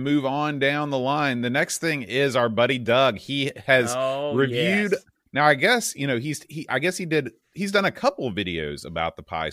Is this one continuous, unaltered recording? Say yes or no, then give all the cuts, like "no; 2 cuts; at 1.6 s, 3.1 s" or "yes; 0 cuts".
yes; 0 cuts